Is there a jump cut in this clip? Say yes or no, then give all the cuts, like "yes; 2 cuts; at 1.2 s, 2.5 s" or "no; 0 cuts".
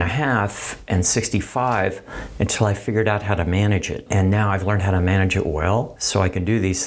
no; 0 cuts